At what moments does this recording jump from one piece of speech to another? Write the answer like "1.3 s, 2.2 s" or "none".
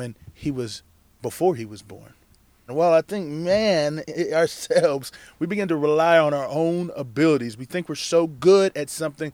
2.7 s